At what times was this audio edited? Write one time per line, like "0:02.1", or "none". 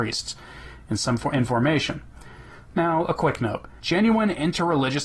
0:03.8